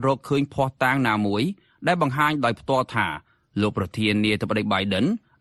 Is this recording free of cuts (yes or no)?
yes